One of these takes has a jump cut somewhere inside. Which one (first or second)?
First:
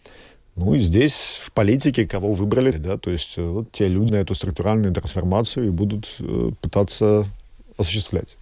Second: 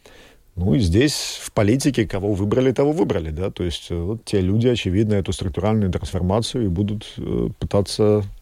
first